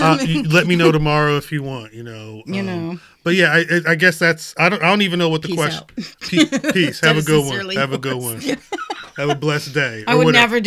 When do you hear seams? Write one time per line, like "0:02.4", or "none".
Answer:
none